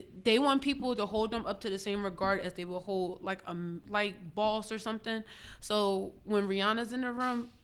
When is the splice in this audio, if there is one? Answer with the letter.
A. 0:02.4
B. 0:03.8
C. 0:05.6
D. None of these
B